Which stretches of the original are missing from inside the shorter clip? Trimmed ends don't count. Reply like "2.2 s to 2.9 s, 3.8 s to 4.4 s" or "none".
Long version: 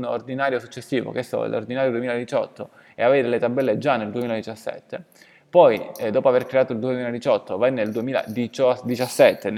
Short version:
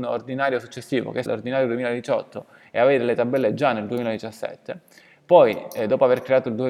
1.3 s to 1.5 s